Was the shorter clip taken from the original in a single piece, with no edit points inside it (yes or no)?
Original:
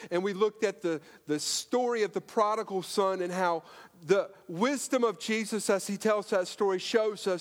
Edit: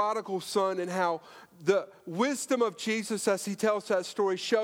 yes